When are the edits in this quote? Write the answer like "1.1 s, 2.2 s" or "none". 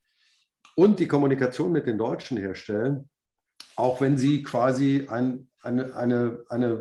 none